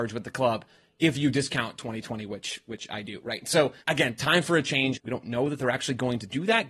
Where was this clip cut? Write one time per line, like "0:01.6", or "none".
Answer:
0:03.8
0:05.0

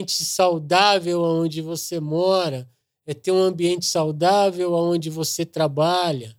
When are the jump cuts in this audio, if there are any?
none

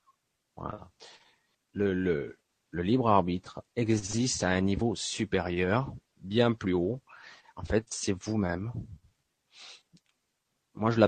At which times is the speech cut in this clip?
0:01.5

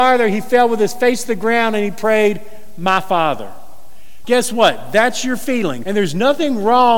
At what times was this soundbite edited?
0:04.2
0:05.8

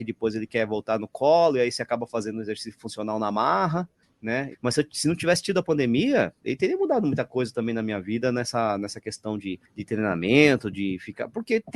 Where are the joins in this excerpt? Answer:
0:04.5

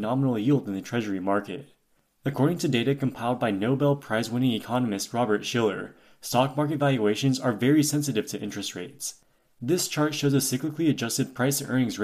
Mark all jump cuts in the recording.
none

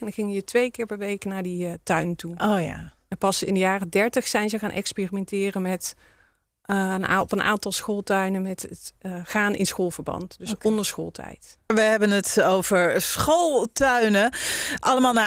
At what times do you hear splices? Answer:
none

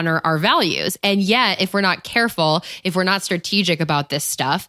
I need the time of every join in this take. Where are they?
none

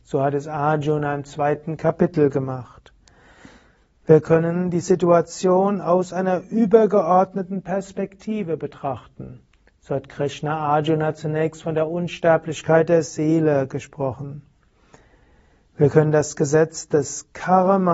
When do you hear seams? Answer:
none

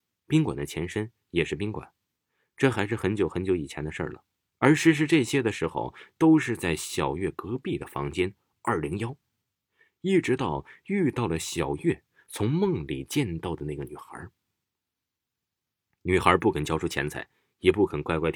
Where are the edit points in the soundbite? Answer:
0:04.4

